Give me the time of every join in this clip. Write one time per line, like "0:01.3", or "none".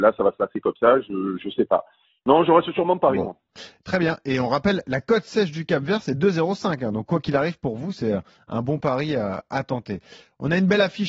none